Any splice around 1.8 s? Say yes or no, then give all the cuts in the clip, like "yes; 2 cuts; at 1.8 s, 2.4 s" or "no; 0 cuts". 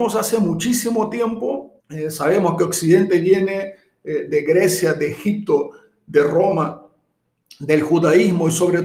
yes; 1 cut; at 1.8 s